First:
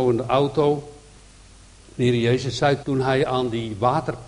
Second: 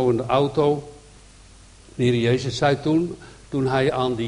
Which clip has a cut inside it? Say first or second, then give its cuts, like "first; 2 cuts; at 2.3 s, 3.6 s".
first; 1 cut; at 2.8 s